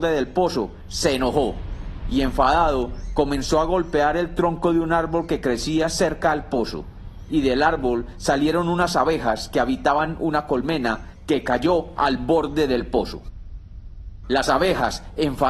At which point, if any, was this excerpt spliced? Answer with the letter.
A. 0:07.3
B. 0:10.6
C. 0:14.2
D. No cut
D